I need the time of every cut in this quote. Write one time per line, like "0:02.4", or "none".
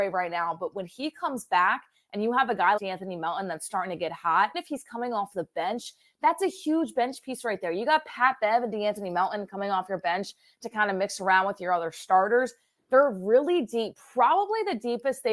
0:02.8
0:04.5